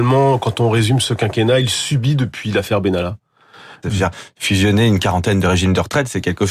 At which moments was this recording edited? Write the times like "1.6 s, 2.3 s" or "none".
3.8 s